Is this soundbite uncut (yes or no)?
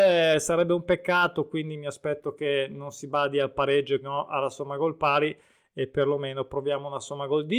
no